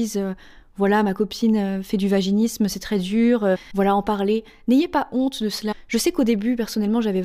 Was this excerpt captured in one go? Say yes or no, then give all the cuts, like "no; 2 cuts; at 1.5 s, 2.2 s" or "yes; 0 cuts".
no; 1 cut; at 3.7 s